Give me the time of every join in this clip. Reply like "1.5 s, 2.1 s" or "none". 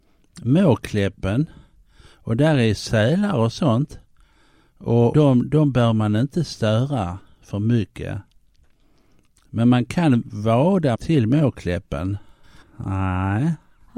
5.1 s, 10.9 s, 12.6 s